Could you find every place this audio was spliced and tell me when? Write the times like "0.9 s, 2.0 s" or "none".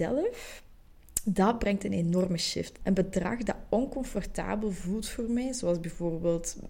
2.8 s